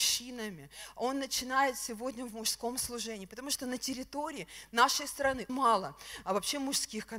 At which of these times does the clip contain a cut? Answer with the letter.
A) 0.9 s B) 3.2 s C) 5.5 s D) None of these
C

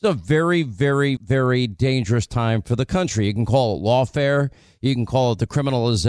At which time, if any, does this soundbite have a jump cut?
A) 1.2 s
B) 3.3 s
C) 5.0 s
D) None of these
A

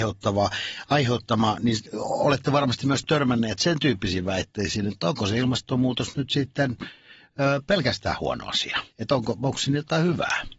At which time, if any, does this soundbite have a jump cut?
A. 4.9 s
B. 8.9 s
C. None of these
B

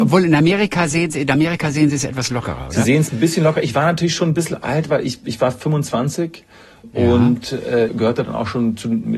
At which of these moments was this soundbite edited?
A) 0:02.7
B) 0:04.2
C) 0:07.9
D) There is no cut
C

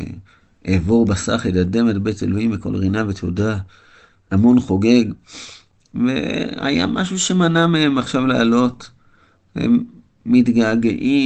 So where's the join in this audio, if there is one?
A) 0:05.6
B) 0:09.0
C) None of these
C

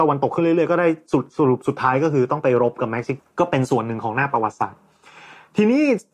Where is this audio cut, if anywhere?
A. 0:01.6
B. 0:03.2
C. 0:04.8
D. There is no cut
B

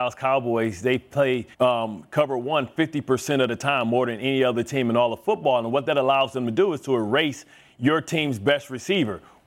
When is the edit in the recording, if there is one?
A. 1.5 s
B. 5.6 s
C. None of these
A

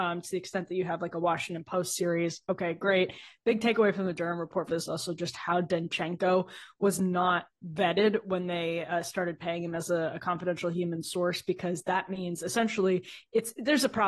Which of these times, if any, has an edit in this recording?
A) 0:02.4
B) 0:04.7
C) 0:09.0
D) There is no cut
B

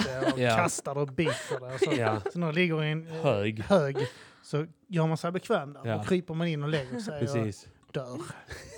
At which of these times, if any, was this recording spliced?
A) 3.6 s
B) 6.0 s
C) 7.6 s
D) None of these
D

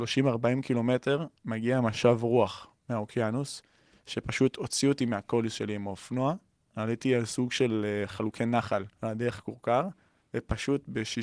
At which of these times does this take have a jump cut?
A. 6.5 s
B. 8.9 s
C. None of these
B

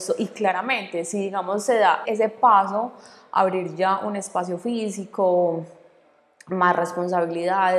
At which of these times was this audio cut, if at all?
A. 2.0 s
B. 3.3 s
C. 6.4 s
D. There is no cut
A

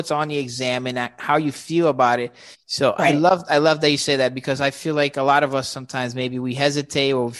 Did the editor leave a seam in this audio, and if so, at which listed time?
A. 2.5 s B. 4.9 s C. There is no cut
A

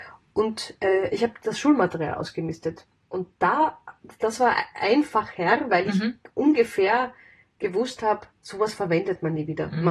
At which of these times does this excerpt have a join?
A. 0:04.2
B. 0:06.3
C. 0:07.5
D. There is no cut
D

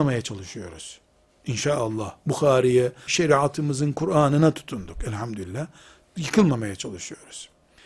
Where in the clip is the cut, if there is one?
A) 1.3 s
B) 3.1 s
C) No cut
B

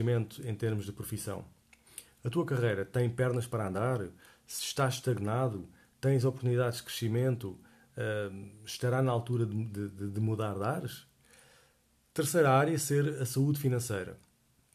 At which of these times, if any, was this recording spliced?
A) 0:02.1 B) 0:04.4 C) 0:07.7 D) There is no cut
D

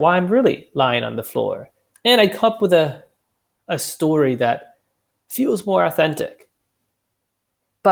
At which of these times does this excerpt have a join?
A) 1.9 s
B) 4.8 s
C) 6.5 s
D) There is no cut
A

